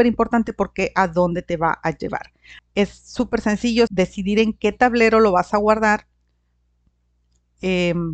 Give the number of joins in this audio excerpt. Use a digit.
2